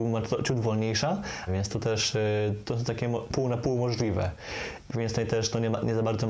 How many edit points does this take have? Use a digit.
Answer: 3